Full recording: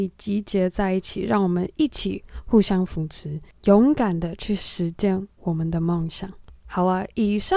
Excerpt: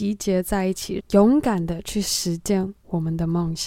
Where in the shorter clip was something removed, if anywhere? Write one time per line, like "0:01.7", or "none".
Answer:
0:01.0